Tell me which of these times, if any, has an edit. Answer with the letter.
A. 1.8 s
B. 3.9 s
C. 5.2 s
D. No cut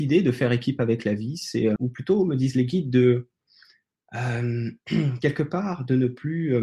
A